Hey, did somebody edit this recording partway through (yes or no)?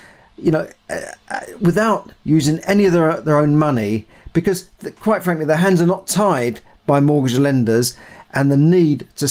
no